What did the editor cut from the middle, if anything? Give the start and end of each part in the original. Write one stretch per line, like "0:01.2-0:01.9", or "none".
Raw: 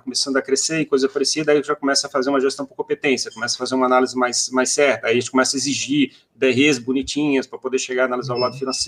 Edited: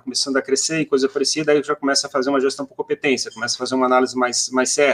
none